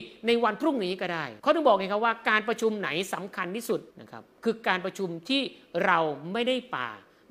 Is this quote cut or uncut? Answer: cut